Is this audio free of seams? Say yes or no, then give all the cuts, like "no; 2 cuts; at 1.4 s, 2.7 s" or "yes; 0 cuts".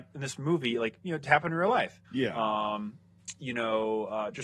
no; 1 cut; at 2.0 s